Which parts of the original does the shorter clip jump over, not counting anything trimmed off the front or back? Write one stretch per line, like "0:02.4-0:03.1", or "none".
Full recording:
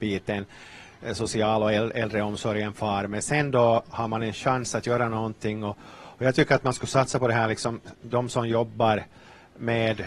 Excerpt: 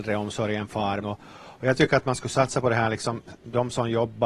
0:03.1-0:05.6